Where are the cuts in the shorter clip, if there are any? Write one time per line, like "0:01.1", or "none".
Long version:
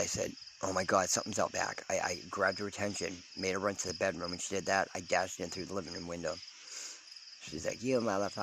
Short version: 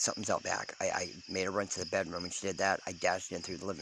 0:01.2